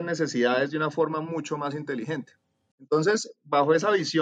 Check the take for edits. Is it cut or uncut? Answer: cut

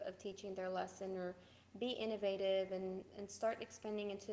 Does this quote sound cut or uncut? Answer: uncut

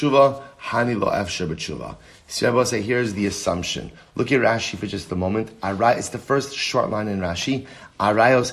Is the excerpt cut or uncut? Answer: uncut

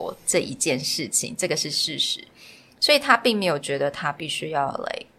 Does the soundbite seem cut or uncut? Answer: uncut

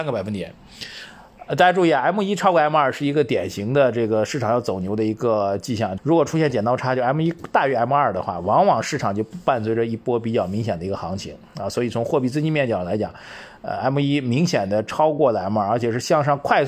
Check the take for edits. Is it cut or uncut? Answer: cut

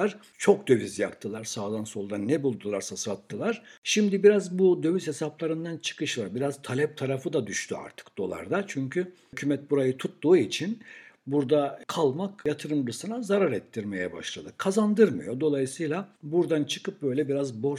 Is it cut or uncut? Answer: uncut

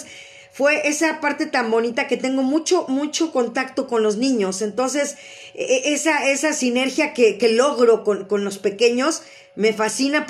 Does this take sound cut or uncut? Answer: uncut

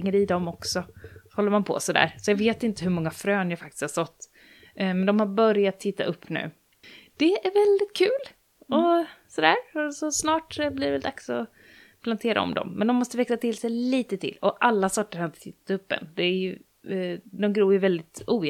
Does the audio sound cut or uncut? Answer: uncut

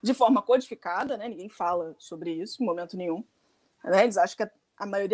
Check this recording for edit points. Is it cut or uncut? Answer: uncut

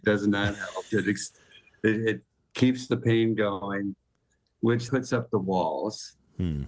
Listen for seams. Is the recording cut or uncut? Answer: cut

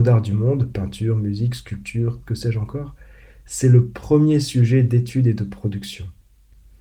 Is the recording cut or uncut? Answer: cut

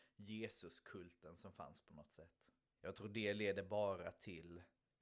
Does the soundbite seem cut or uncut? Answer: cut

